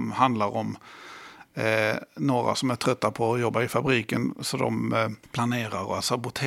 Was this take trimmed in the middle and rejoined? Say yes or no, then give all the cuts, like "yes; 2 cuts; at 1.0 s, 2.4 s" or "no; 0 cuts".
no; 0 cuts